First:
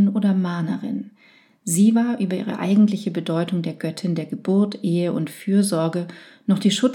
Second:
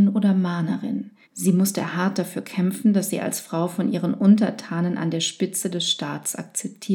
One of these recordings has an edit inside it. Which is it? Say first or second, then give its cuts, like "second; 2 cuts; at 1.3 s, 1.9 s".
second; 1 cut; at 1.2 s